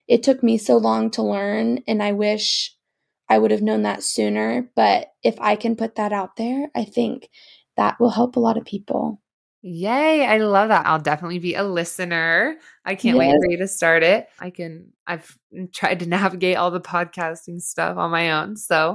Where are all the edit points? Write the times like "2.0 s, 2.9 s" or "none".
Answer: 10.8 s, 14.4 s